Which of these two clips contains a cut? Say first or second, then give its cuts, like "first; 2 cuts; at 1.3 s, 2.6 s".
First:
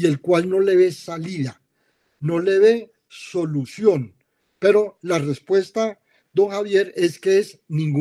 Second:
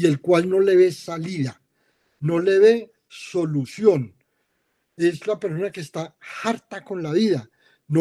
first; 1 cut; at 4.4 s